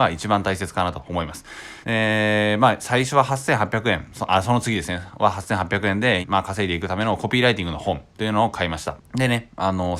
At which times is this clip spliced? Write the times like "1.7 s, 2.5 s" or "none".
1.8 s, 6.2 s, 9.0 s